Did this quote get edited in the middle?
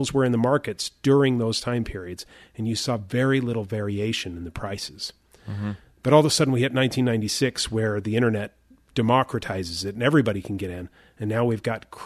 no; 0 cuts

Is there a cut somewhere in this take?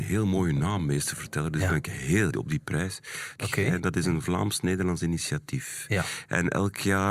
yes; 2 cuts; at 2.3 s, 3.4 s

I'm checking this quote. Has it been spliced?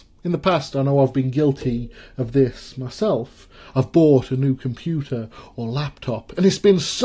no; 0 cuts

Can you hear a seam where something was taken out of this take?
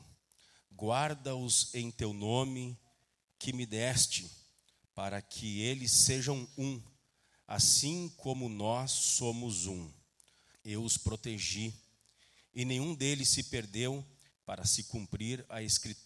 yes; 2 cuts; at 10.5 s, 14.3 s

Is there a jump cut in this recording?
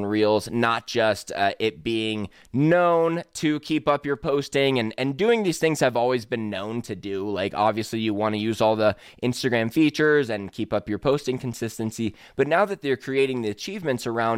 no; 0 cuts

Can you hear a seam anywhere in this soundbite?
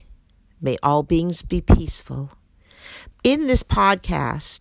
yes; 1 cut; at 3.1 s

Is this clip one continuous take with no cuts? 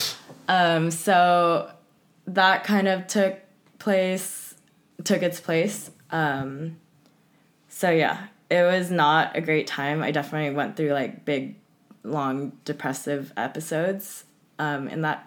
yes; 0 cuts

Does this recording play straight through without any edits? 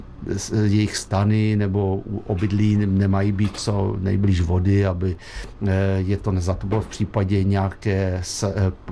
yes; 0 cuts

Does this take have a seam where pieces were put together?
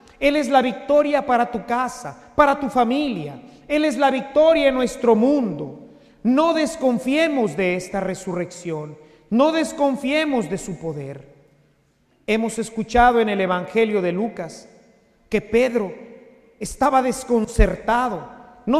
no; 0 cuts

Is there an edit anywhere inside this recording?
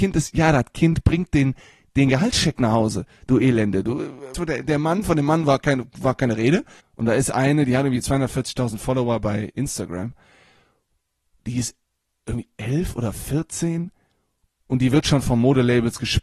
yes; 2 cuts; at 4.3 s, 6.8 s

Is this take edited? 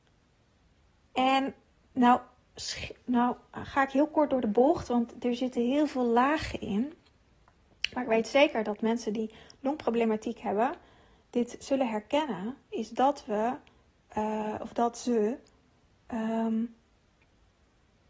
yes; 1 cut; at 1.0 s

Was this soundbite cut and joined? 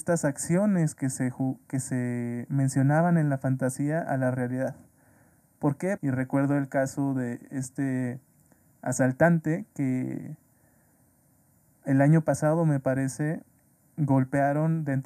yes; 1 cut; at 6.0 s

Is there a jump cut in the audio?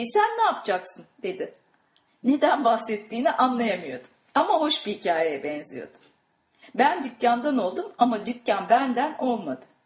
yes; 2 cuts; at 2.1 s, 6.6 s

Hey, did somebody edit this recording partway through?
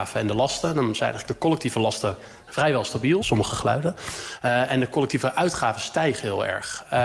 yes; 1 cut; at 3.2 s

